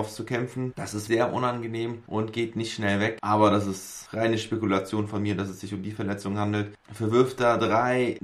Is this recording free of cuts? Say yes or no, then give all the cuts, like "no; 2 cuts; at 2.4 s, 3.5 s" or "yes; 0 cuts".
no; 2 cuts; at 1.1 s, 6.8 s